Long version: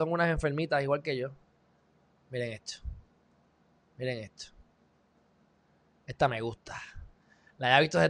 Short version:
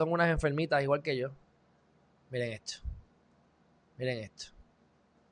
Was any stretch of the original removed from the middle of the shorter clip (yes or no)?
no